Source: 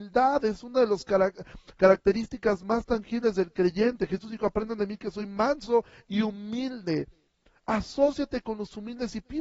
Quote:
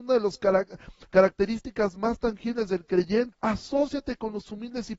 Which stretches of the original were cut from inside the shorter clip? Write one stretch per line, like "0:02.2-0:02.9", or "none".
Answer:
0:04.0-0:07.6